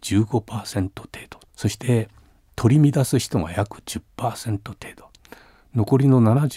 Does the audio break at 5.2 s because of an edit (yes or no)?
no